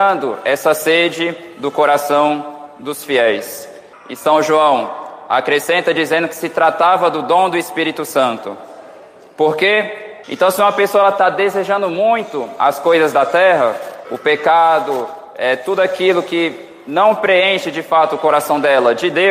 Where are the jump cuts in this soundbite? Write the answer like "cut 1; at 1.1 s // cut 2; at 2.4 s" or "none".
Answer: cut 1; at 3.9 s // cut 2; at 10.2 s // cut 3; at 14.0 s